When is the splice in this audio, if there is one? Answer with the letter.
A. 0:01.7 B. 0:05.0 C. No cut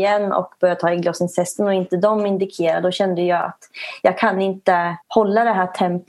B